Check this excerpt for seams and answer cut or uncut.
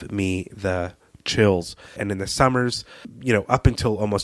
cut